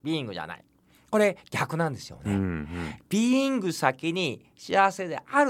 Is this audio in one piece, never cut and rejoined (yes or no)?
yes